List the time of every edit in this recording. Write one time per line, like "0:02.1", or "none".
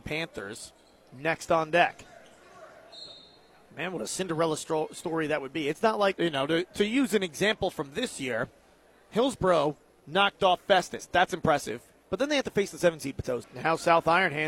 0:06.1
0:13.4